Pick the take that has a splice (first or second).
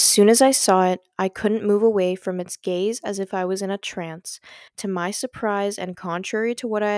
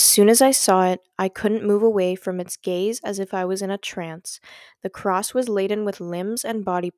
first